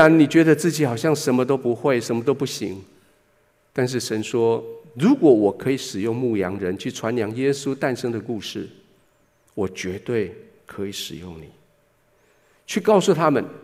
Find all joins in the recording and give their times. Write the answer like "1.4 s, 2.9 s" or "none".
none